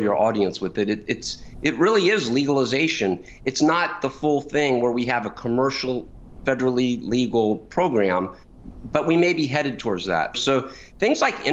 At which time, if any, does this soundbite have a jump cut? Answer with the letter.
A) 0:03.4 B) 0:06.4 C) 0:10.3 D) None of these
C